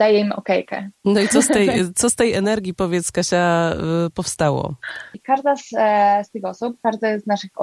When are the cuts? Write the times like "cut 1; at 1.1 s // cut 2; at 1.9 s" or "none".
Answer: cut 1; at 5.1 s